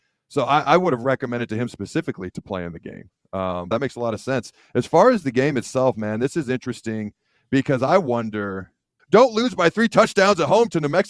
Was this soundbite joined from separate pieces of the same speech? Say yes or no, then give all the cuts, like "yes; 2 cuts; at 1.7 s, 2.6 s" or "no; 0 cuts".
yes; 2 cuts; at 3.7 s, 9.0 s